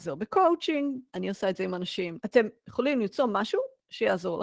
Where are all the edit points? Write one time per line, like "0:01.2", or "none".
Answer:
0:01.1
0:02.2